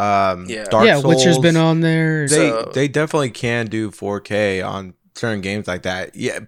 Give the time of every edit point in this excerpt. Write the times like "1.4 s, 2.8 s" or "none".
2.3 s

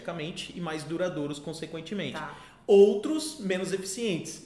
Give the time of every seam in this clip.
none

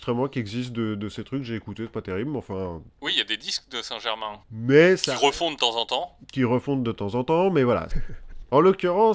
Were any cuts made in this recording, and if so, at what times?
4.4 s, 7.9 s

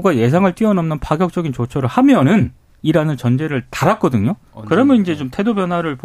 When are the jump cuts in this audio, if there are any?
none

